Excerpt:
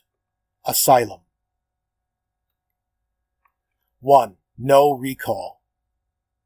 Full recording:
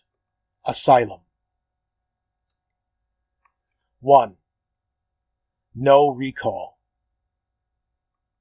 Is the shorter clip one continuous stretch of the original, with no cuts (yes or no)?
no